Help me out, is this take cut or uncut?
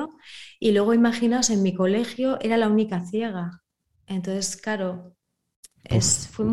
uncut